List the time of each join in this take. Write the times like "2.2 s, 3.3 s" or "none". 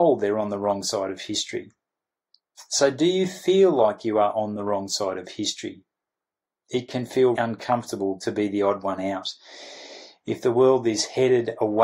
7.3 s